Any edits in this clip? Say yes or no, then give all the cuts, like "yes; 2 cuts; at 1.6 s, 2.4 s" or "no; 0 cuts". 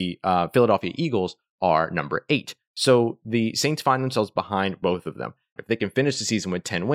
yes; 1 cut; at 5.6 s